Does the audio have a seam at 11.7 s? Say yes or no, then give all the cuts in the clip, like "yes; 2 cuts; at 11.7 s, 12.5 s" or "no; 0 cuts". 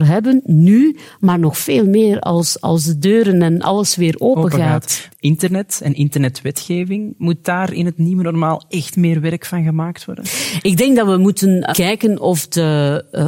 yes; 1 cut; at 11.7 s